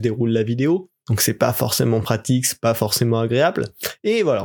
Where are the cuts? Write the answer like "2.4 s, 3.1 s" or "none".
none